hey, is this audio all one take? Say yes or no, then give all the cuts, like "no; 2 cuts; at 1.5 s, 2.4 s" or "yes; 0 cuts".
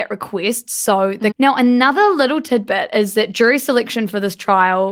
no; 1 cut; at 1.3 s